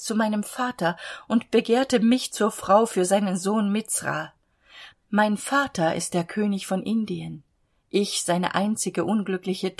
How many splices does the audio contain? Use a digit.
1